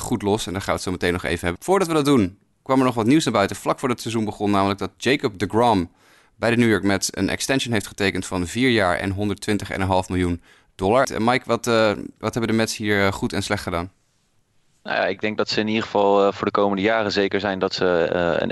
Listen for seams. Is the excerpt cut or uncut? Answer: cut